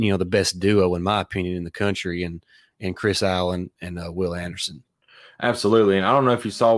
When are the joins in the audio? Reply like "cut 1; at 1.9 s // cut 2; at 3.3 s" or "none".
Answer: none